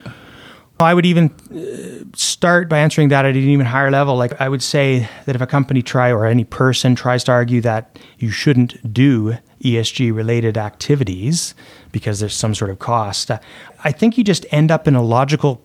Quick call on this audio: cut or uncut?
uncut